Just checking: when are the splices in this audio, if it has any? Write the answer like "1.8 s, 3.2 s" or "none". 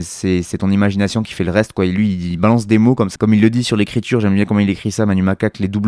3.2 s